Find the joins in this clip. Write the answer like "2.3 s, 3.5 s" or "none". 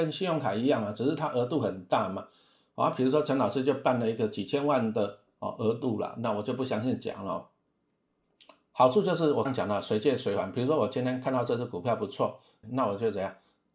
9.4 s, 12.6 s